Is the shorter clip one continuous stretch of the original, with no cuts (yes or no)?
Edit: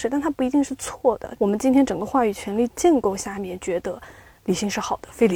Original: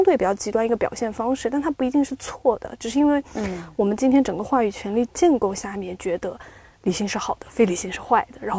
no